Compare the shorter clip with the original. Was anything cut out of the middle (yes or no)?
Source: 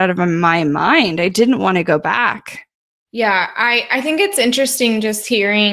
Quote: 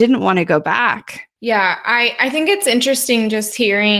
yes